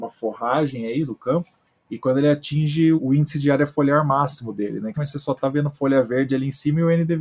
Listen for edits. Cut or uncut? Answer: cut